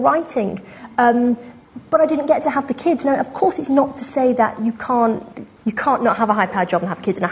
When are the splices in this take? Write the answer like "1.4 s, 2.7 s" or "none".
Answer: 5.6 s

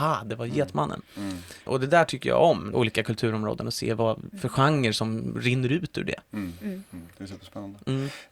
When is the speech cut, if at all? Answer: 2.7 s

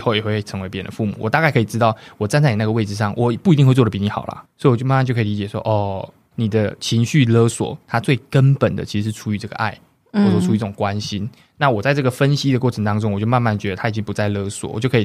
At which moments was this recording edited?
4.4 s

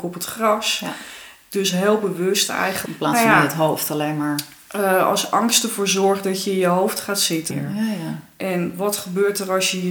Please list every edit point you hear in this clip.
2.9 s, 7.5 s

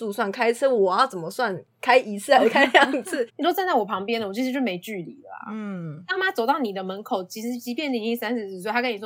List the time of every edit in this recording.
3.3 s, 6.2 s

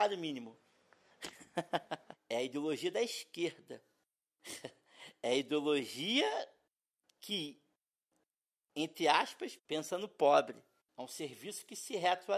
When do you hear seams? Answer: 2.1 s, 9.6 s, 10.8 s

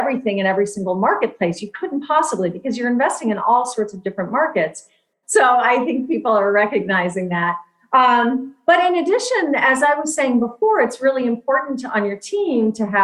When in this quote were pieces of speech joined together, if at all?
5.2 s

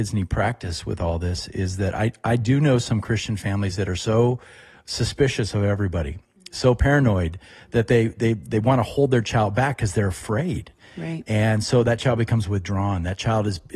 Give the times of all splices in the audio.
none

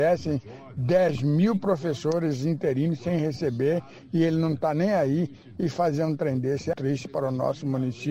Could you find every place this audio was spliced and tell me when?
6.7 s

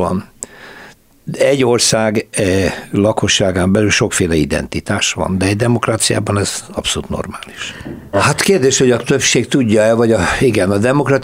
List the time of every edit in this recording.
8.1 s

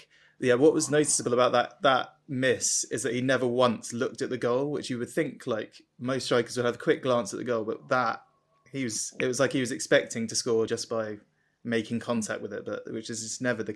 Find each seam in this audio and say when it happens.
none

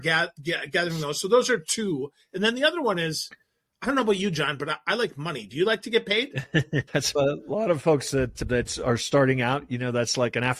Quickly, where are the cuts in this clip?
none

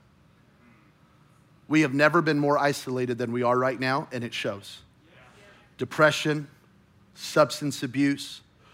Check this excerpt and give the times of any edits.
none

